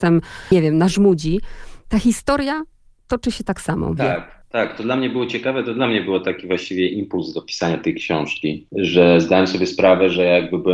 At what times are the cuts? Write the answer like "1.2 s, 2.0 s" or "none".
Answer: 4.0 s